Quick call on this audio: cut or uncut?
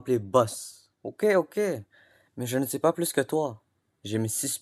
cut